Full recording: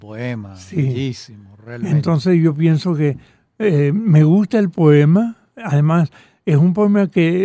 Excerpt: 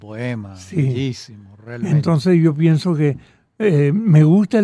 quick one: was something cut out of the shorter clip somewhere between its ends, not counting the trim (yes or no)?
no